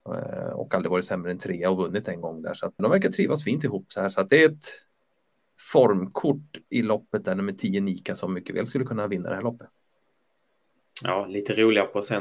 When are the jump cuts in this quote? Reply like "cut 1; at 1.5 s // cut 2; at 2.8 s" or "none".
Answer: cut 1; at 2.8 s